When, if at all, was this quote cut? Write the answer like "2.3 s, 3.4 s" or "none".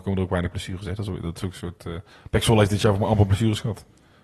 none